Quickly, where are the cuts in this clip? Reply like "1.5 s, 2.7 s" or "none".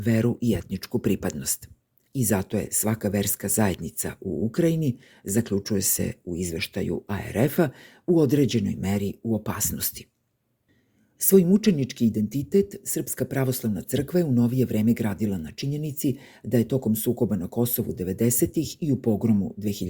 none